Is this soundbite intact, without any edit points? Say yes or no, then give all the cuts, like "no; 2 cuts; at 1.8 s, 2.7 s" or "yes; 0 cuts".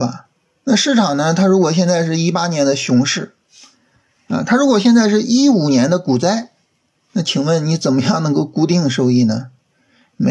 yes; 0 cuts